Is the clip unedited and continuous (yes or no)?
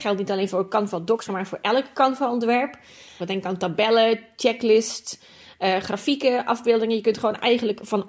no